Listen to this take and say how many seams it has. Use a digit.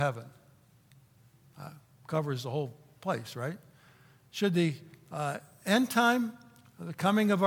0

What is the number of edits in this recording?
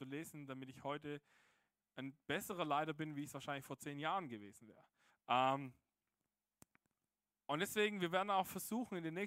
1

